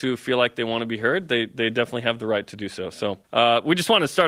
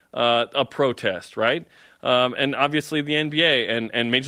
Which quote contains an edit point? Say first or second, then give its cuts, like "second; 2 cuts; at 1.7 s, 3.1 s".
first; 1 cut; at 3.2 s